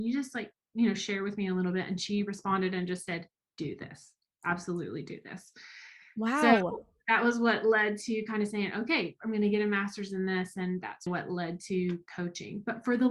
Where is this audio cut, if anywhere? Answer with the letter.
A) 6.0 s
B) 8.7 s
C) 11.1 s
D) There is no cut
C